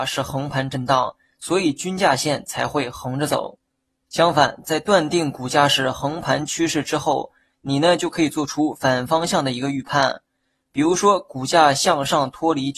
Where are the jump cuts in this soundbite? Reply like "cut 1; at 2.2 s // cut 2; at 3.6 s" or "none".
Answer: cut 1; at 4.0 s // cut 2; at 7.5 s